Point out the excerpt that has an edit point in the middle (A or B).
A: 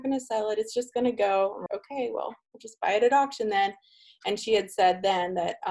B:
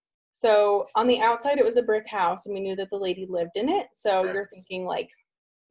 A